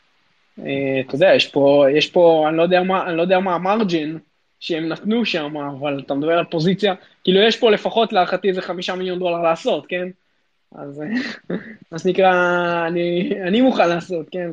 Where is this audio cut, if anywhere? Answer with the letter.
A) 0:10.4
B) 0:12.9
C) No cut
C